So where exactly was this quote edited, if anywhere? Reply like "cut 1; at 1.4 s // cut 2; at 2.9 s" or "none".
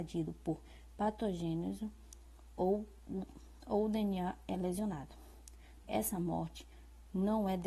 cut 1; at 5.8 s